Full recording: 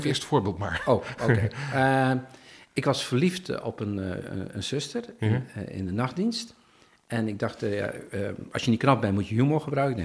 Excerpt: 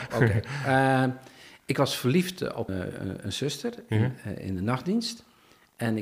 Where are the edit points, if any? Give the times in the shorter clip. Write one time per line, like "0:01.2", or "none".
0:02.7